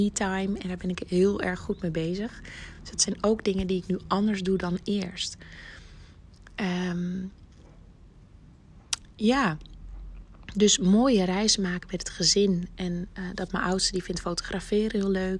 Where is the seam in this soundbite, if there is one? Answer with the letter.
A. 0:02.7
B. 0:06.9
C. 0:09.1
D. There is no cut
D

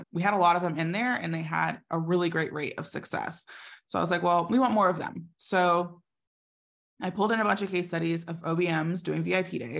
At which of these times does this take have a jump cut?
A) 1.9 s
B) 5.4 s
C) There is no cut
C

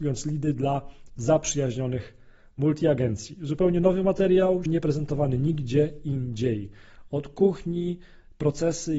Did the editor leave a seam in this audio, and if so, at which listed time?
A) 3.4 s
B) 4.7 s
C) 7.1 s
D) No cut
B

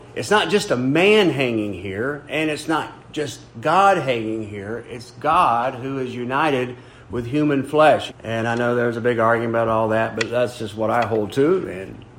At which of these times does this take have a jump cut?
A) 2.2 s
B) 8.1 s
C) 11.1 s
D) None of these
B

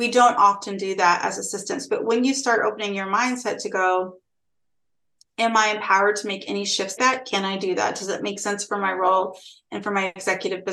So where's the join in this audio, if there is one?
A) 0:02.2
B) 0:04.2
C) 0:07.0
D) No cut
C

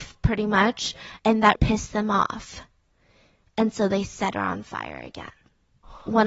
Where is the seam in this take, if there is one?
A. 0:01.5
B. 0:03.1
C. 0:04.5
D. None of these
A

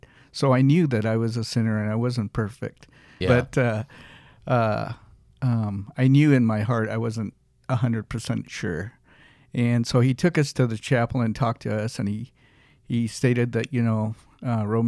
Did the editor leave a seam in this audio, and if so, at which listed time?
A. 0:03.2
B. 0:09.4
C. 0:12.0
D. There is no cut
A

